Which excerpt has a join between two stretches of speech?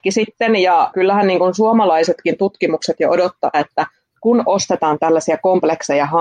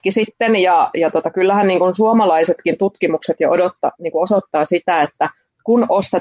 first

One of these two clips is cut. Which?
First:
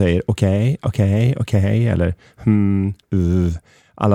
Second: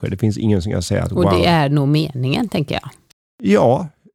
first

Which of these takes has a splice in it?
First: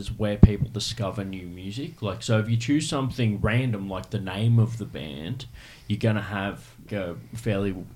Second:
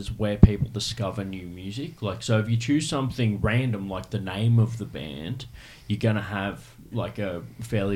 first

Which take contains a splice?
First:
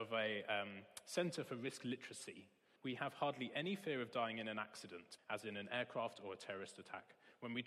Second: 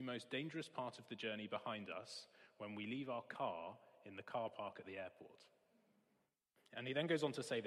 first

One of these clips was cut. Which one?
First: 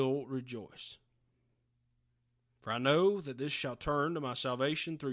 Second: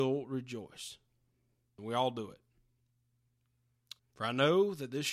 second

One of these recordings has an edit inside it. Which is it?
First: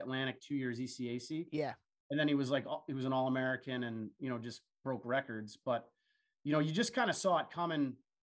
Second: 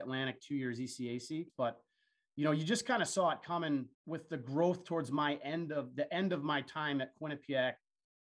second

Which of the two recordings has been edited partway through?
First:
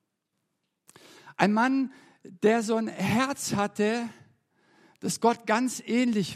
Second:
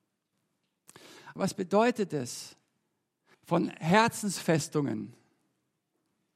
second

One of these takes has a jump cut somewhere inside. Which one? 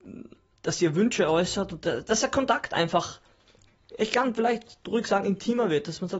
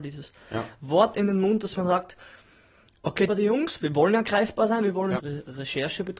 second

